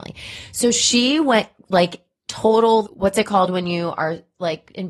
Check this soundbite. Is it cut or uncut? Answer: cut